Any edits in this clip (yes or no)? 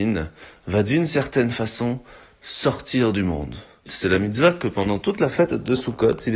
yes